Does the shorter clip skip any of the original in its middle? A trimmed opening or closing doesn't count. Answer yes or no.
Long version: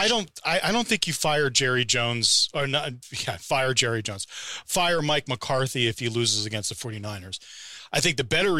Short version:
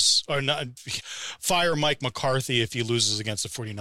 yes